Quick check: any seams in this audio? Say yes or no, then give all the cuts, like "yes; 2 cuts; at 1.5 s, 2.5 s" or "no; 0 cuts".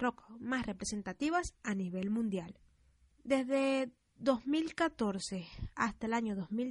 yes; 1 cut; at 3.1 s